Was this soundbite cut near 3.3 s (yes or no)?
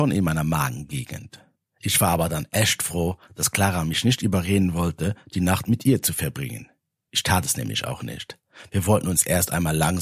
no